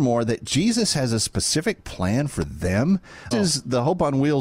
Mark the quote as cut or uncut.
cut